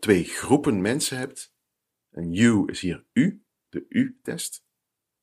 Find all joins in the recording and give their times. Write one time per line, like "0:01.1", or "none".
0:01.9